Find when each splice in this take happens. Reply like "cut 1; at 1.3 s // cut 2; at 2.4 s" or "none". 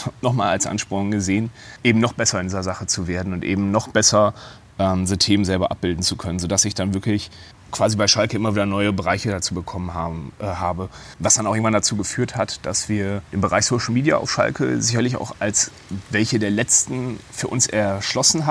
none